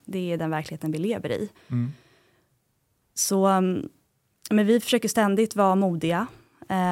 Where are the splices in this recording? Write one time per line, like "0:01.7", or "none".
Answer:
none